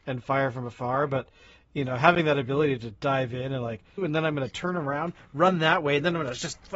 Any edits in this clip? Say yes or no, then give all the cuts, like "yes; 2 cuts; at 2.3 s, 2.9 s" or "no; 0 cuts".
yes; 1 cut; at 4.0 s